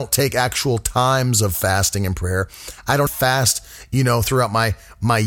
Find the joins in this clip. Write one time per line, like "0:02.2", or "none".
0:03.1